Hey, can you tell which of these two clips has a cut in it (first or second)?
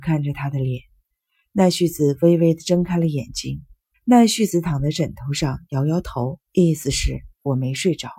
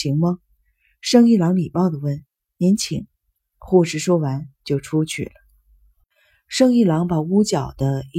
first